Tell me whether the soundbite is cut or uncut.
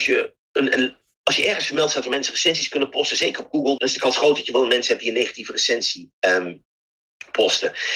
cut